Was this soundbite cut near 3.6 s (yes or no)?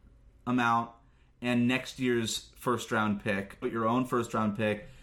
yes